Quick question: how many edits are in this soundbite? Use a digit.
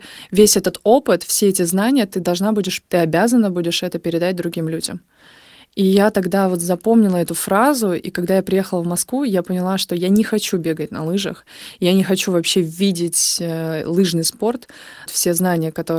2